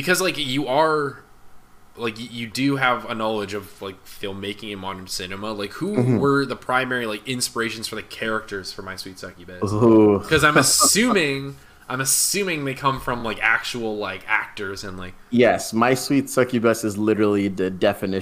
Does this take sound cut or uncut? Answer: uncut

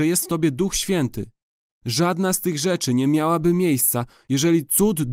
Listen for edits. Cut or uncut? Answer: uncut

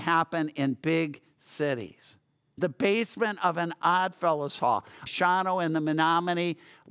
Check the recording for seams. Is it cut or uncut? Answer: cut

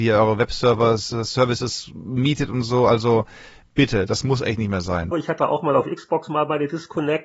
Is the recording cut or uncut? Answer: cut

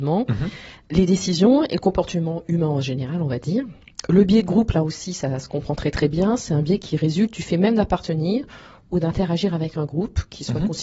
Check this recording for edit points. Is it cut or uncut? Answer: uncut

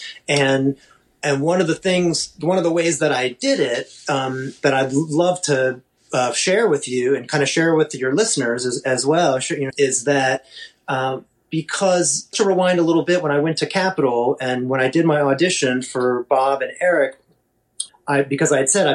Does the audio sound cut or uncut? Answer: cut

